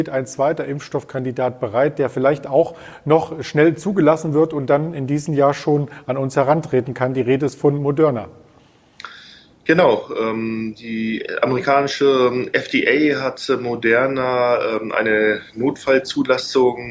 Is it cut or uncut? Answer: uncut